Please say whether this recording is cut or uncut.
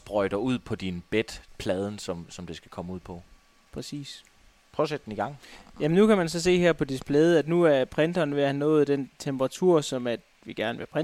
uncut